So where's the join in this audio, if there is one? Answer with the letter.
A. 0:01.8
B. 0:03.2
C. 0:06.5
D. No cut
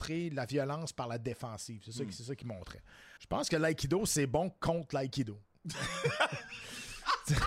B